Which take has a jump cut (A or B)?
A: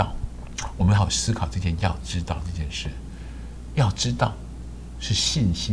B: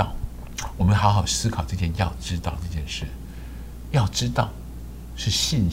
A